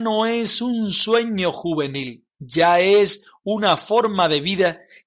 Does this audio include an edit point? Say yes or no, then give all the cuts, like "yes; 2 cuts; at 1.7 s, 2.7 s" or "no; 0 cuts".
yes; 1 cut; at 2.3 s